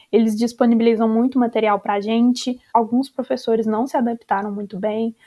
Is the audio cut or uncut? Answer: cut